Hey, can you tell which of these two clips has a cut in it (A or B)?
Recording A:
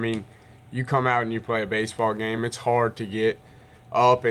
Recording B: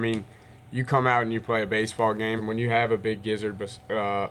B